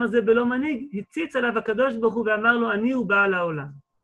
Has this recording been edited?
no; 0 cuts

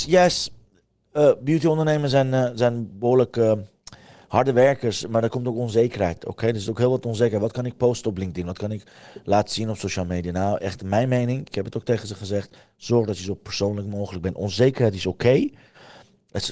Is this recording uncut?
yes; 0 cuts

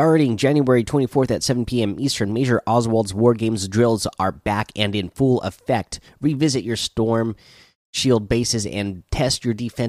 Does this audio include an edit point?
no; 0 cuts

